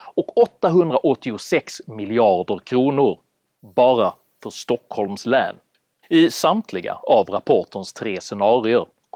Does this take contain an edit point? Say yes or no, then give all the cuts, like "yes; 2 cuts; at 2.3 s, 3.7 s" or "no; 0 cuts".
yes; 1 cut; at 6.0 s